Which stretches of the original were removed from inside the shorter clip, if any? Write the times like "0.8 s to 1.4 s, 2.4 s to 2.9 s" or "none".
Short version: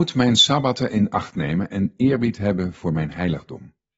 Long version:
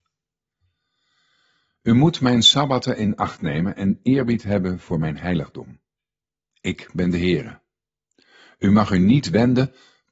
none